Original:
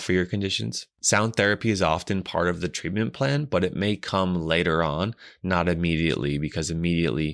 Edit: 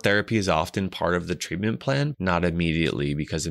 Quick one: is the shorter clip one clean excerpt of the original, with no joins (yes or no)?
no